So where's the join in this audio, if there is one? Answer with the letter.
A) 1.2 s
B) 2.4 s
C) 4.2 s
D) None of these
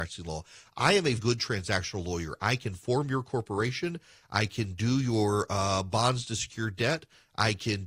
A